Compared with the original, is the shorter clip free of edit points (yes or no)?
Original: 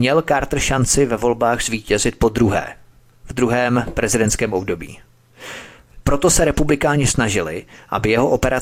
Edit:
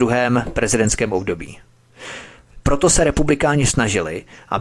yes